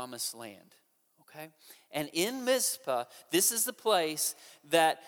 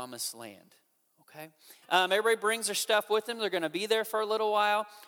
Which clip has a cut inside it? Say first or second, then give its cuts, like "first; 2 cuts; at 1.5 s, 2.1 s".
second; 1 cut; at 1.8 s